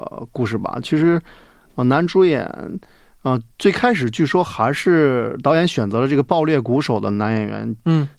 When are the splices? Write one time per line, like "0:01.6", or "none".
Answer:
none